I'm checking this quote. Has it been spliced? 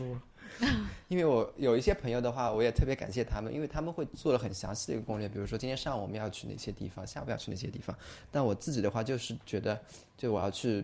no; 0 cuts

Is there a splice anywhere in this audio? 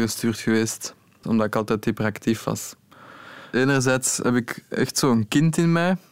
yes; 2 cuts; at 1.2 s, 3.5 s

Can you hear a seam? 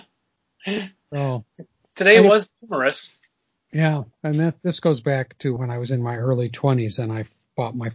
yes; 2 cuts; at 4.1 s, 5.6 s

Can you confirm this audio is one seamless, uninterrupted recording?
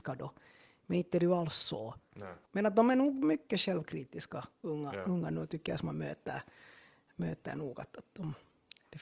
yes; 0 cuts

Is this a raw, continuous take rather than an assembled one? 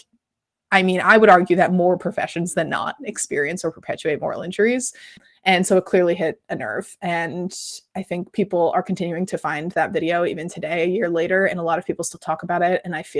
yes; 0 cuts

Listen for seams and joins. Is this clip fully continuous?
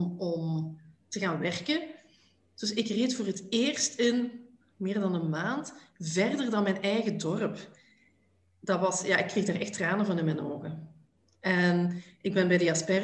yes; 0 cuts

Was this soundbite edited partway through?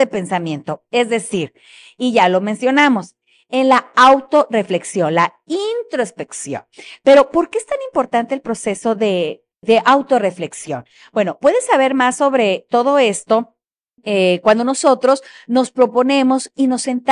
no; 0 cuts

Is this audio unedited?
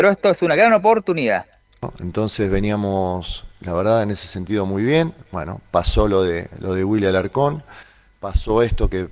yes; 0 cuts

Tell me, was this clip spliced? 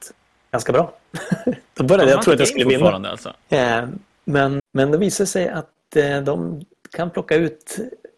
yes; 2 cuts; at 3.4 s, 4.6 s

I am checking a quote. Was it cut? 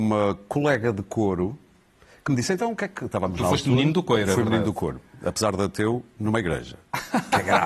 no; 0 cuts

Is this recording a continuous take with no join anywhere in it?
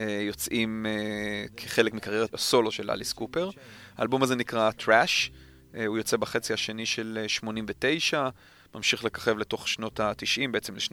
no; 1 cut; at 2.3 s

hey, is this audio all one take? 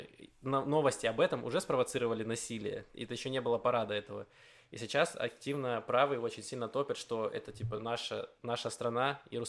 yes; 0 cuts

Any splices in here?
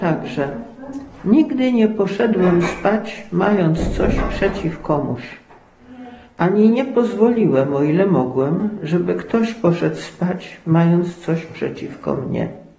no; 0 cuts

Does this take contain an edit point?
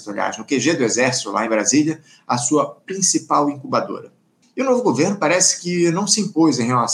yes; 1 cut; at 4.4 s

